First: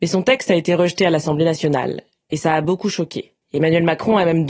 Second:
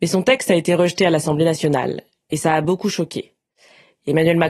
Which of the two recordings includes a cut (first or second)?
first